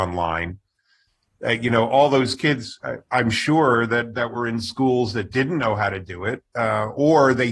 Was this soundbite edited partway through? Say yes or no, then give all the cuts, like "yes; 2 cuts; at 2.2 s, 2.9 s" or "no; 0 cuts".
no; 0 cuts